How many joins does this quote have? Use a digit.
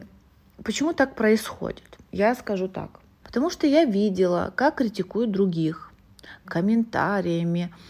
2